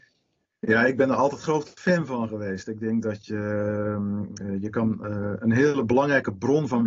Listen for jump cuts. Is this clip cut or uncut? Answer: cut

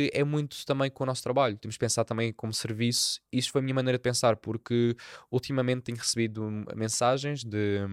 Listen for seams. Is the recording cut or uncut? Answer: uncut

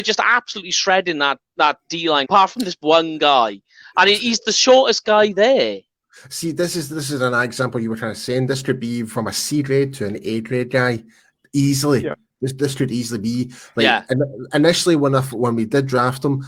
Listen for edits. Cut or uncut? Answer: cut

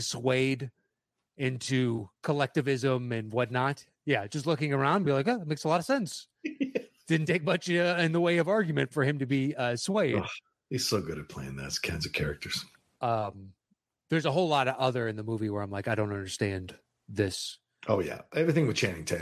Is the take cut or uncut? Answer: uncut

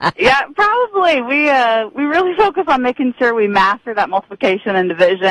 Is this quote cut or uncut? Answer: uncut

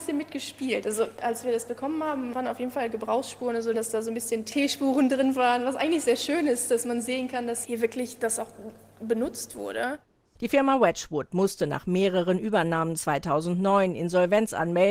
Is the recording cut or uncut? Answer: cut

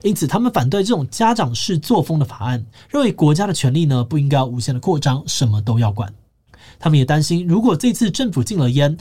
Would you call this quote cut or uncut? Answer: uncut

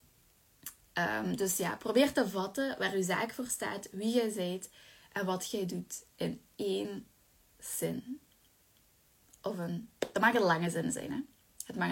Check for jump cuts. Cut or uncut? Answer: uncut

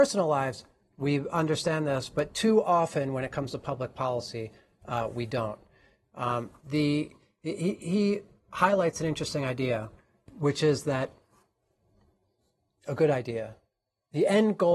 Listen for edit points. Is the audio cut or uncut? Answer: uncut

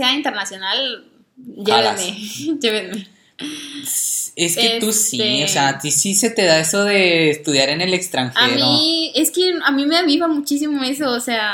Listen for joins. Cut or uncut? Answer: uncut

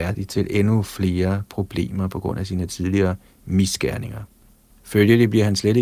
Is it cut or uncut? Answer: cut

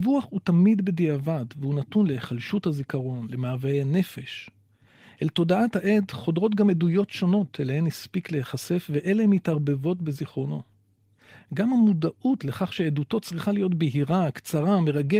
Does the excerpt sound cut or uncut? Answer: uncut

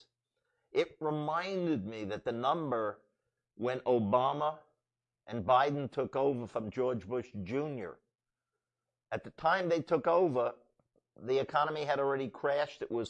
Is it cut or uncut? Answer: uncut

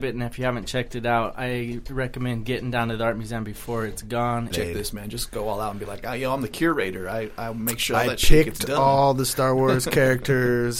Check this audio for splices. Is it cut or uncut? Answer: cut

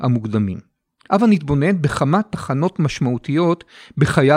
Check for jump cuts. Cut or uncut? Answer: cut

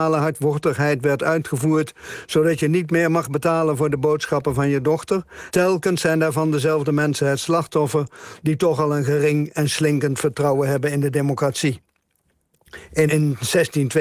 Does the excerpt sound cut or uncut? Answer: cut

